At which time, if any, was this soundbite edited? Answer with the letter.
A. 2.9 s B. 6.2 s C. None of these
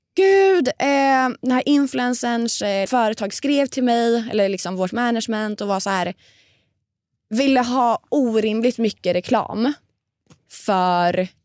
A